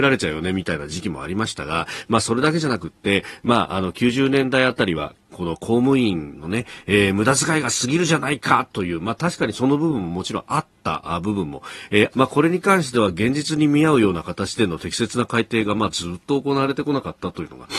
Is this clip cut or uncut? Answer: cut